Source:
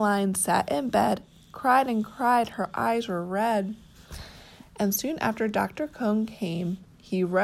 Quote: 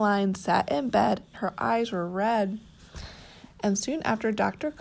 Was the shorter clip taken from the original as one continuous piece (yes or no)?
no